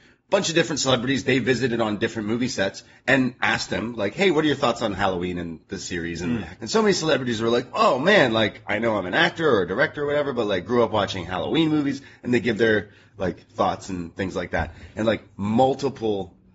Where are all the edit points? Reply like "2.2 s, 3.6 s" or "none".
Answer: 6.6 s